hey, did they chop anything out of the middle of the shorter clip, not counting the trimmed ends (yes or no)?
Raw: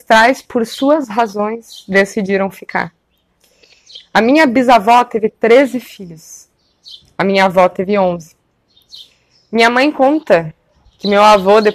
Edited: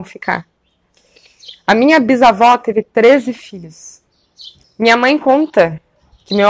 yes